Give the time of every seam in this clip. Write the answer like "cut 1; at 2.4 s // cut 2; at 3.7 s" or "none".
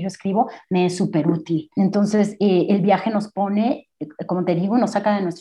cut 1; at 1.7 s